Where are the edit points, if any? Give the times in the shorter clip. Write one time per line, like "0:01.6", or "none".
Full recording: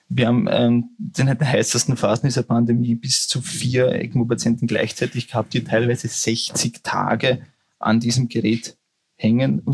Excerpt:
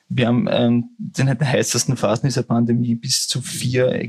none